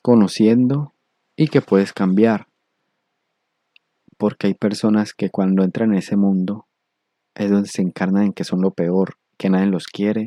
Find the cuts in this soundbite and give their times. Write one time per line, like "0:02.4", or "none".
none